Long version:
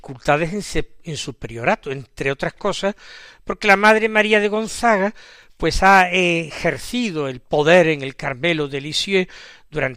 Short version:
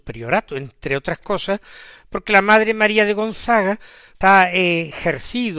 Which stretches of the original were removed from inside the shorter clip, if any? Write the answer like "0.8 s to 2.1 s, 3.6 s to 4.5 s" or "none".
5.6 s to 5.8 s